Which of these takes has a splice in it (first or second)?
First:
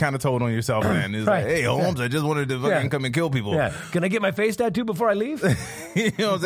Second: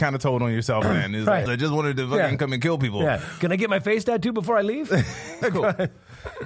second